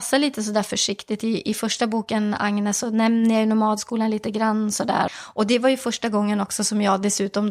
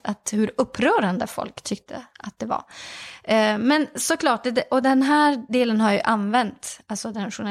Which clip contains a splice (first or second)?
first